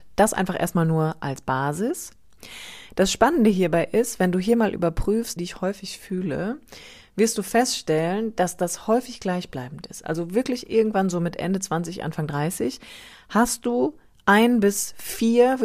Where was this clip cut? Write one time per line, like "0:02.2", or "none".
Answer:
0:05.4